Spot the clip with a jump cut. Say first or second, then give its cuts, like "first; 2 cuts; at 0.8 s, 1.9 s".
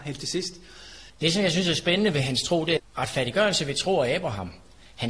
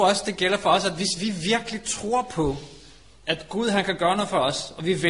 first; 2 cuts; at 1.1 s, 2.8 s